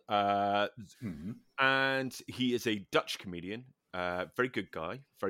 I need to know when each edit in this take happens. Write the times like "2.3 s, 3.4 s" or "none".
0.9 s